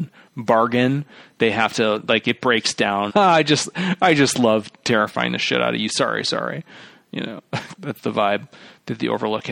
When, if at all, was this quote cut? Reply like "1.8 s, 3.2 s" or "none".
3.1 s, 5.9 s, 7.7 s